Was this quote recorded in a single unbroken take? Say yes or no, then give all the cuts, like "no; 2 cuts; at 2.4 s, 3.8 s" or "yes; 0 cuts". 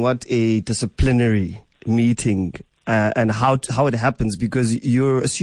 no; 1 cut; at 1.7 s